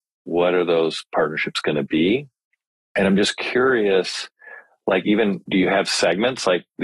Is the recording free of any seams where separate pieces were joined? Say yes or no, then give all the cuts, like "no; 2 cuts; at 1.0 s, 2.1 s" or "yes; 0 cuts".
yes; 0 cuts